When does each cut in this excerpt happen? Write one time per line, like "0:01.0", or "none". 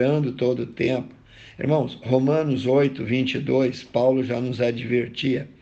none